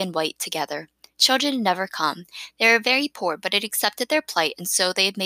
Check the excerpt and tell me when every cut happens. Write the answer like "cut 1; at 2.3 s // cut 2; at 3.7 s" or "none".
none